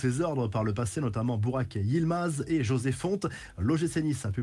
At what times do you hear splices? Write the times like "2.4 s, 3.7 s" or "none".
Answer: none